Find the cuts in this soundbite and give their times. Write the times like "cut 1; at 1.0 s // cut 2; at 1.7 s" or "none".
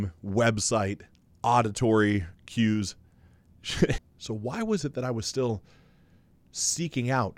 cut 1; at 4.0 s